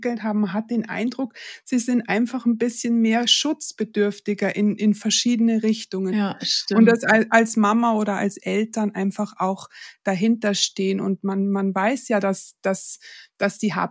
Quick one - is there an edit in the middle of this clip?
yes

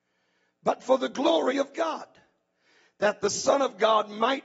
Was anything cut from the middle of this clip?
no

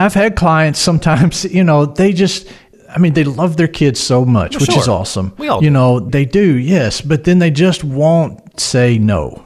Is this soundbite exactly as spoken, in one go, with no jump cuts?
yes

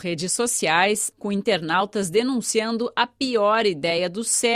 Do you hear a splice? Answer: yes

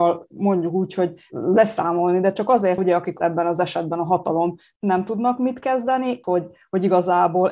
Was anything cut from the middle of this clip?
yes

